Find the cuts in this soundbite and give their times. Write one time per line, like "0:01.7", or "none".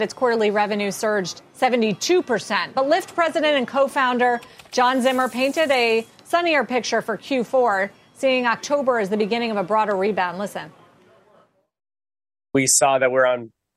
none